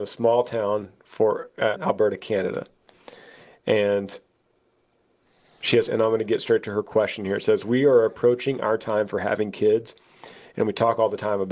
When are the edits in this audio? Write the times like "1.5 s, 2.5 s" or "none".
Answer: 1.7 s, 5.9 s